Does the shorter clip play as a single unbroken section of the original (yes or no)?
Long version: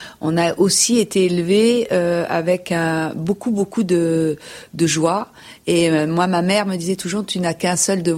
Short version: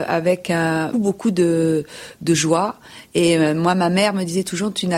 no